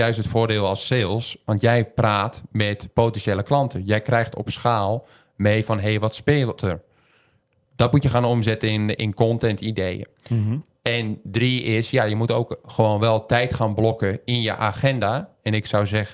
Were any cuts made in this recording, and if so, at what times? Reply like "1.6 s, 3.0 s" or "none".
none